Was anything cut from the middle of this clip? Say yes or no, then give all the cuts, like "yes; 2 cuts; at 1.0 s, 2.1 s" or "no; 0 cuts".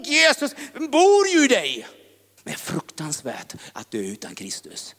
yes; 1 cut; at 2.4 s